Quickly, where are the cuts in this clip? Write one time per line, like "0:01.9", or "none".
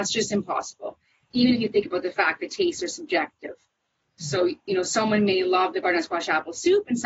none